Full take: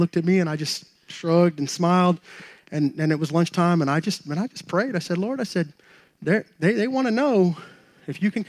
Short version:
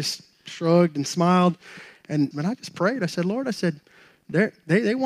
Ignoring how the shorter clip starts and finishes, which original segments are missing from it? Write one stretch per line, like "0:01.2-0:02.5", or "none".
0:02.9-0:04.2